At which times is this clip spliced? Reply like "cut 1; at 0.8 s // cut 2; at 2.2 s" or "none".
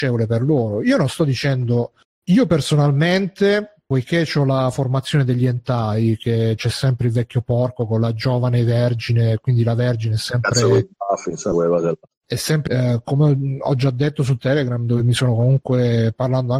cut 1; at 12.7 s

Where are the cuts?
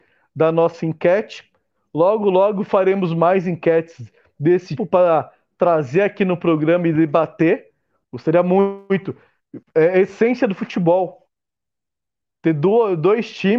cut 1; at 4.8 s // cut 2; at 8.0 s // cut 3; at 9.6 s

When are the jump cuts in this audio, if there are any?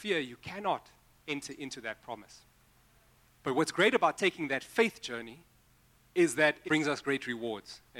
cut 1; at 3.3 s // cut 2; at 6.6 s

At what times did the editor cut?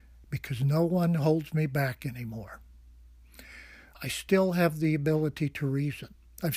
none

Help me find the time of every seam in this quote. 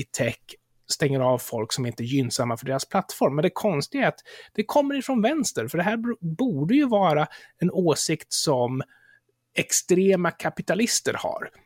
none

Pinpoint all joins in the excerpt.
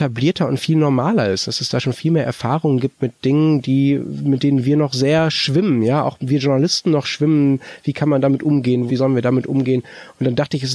cut 1; at 8.9 s

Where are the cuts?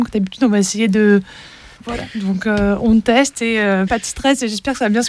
cut 1; at 1.8 s // cut 2; at 3.9 s

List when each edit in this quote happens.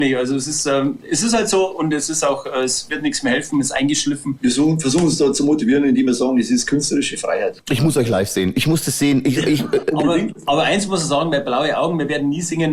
none

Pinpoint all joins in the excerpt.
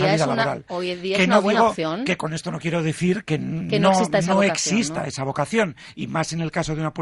none

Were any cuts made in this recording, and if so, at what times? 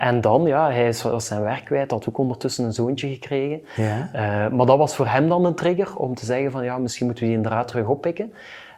none

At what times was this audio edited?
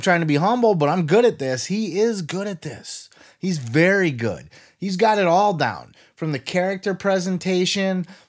none

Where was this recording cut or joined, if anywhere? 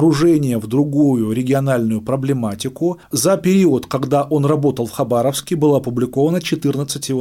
cut 1; at 3.0 s

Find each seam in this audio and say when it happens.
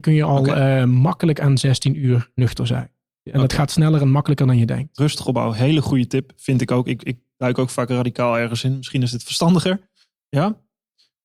none

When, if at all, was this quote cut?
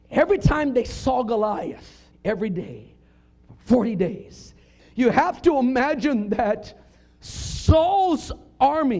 cut 1; at 2.1 s // cut 2; at 4.8 s

